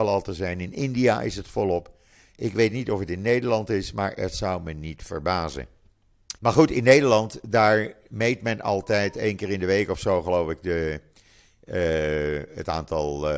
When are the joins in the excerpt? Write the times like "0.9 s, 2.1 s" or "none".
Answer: 6.4 s